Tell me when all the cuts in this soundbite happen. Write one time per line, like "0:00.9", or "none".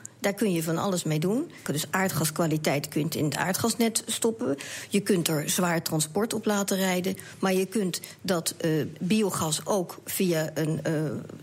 0:01.7

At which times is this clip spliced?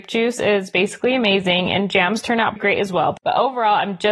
0:02.6

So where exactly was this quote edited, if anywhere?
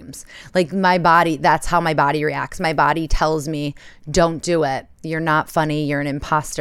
none

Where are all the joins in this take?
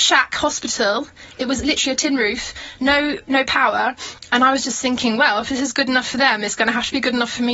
none

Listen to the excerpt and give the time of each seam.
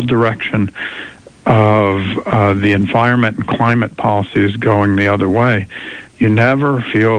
none

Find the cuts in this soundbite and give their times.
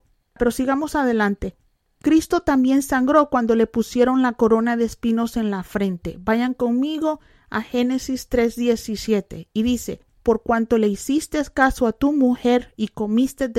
0:10.2

